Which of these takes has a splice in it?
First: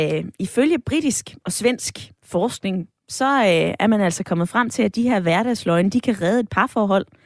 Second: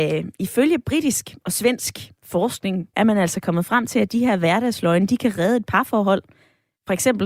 second; 1 cut; at 2.9 s

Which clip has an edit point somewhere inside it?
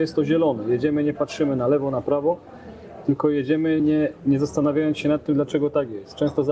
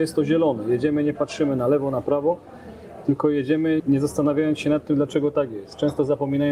second; 1 cut; at 3.8 s

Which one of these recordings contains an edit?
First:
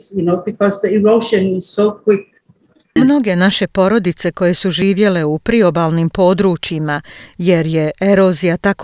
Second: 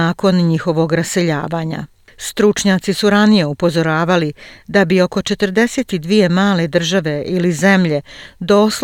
first; 1 cut; at 3.0 s

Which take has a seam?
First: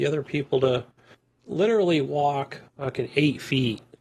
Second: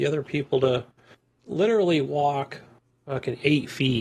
first; 1 cut; at 2.7 s

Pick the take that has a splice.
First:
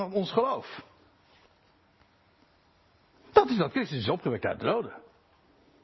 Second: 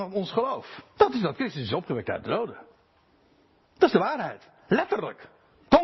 second; 1 cut; at 1.0 s

